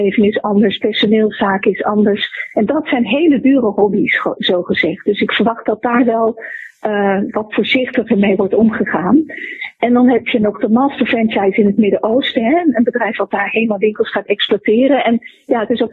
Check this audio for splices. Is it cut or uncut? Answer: uncut